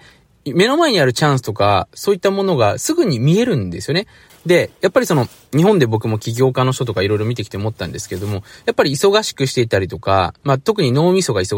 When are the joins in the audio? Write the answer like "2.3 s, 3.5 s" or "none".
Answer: 4.3 s

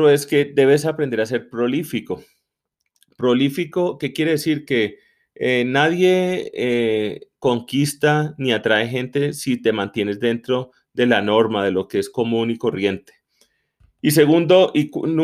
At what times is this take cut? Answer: 13.8 s

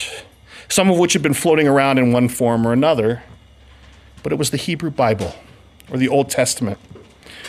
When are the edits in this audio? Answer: none

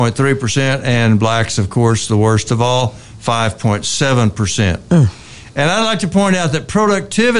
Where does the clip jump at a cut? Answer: none

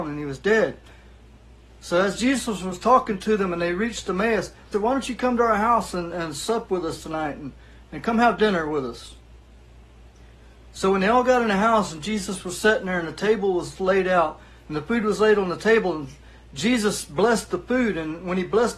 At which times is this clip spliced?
4.7 s

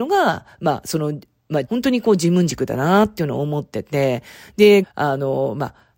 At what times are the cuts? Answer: 1.7 s, 4.8 s

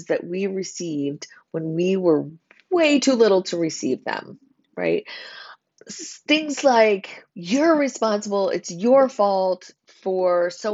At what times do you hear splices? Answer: 7.3 s

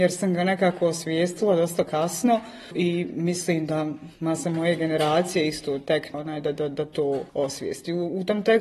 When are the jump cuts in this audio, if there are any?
6.1 s, 7.3 s

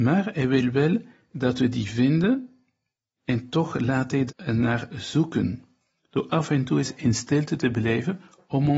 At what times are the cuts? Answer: 4.3 s

